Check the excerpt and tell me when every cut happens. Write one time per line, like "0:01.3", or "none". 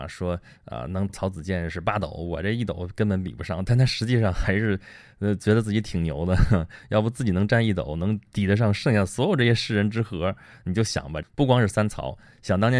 0:01.1
0:11.2